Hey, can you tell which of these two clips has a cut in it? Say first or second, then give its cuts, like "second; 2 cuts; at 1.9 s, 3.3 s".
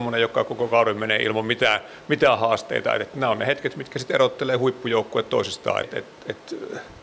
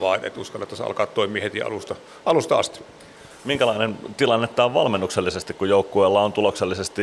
first; 1 cut; at 5.8 s